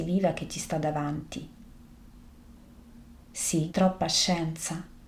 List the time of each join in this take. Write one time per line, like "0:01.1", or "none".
0:03.7